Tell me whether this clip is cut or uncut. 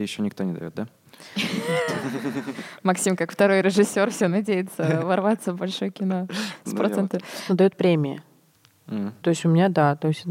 cut